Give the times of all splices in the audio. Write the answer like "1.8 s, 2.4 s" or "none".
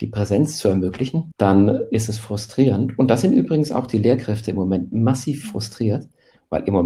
1.3 s